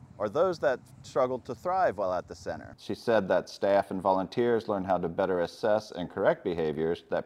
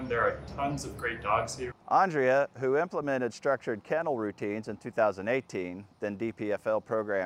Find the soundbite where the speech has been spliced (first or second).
second